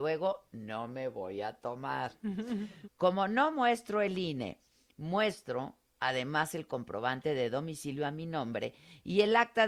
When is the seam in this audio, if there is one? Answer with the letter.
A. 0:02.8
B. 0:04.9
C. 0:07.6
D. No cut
A